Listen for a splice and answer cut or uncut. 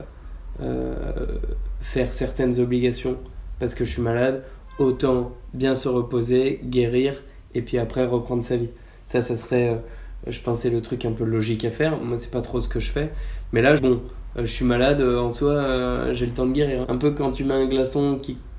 cut